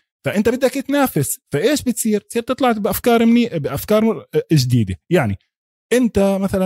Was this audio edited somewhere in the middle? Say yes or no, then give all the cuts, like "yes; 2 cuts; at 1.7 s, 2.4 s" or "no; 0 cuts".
no; 0 cuts